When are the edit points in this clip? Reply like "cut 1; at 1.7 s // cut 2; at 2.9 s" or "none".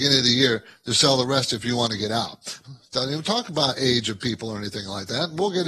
cut 1; at 2.6 s